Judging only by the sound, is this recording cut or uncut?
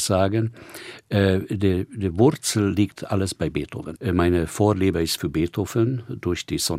cut